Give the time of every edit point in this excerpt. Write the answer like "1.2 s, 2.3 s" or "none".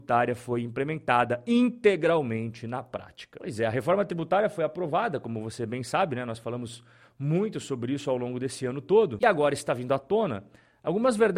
none